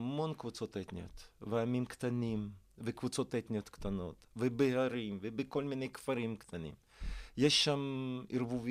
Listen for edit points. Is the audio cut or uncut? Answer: uncut